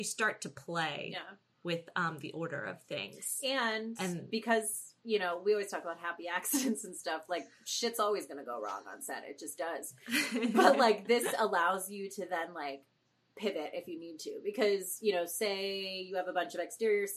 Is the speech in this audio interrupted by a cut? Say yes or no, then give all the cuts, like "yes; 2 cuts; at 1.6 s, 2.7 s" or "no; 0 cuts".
no; 0 cuts